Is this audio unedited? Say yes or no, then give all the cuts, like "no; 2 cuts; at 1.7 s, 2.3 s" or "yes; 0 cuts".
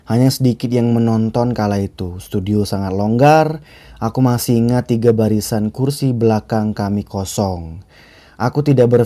yes; 0 cuts